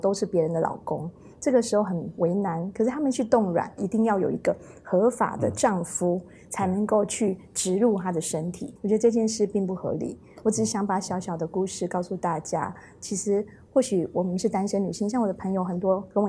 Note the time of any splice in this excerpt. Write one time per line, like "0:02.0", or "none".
0:03.8
0:08.8